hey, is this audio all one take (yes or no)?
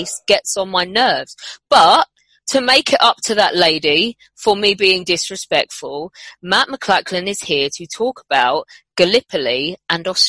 yes